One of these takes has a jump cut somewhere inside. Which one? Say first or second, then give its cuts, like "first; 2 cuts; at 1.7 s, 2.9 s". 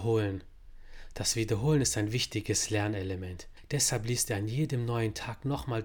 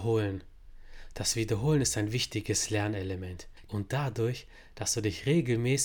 second; 1 cut; at 3.7 s